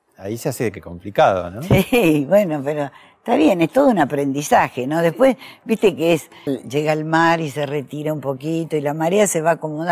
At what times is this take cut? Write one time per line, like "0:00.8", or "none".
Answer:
0:06.5